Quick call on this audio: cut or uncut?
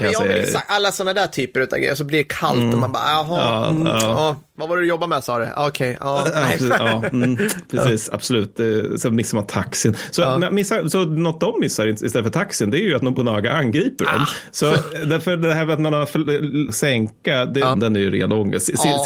cut